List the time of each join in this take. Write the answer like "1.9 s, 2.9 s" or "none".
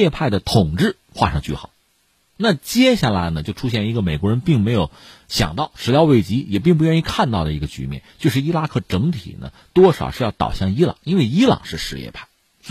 2.2 s

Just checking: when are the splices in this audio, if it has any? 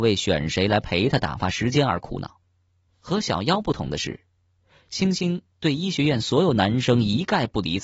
2.9 s

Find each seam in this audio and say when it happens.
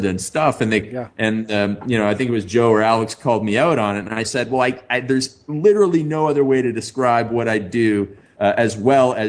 none

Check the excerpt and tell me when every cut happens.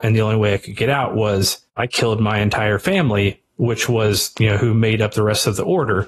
1.7 s

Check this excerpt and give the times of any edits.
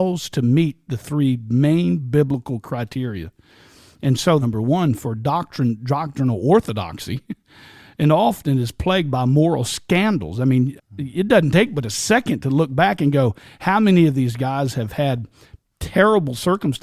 4.4 s, 10.8 s

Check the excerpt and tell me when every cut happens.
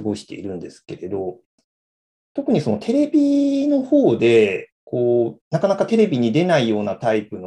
5.4 s

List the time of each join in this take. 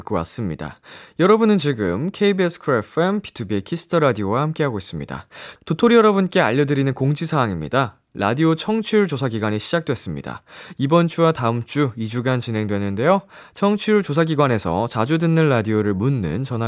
5.6 s

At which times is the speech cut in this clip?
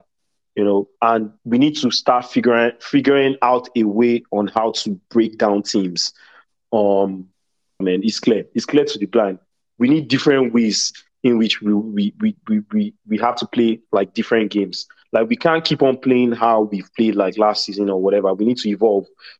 7.8 s

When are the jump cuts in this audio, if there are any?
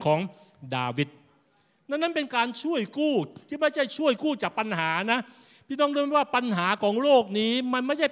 none

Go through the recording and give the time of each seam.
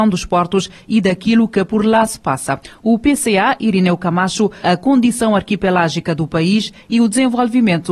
4.6 s

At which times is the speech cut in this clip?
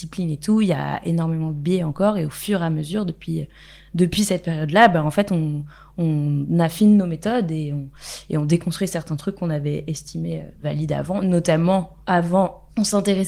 none

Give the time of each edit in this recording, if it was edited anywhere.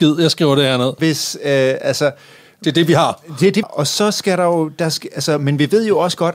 1.0 s, 3.6 s

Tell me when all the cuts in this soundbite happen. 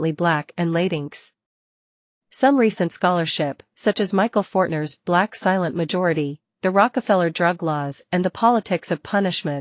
none

